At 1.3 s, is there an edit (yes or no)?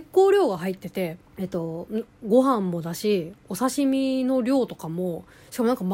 yes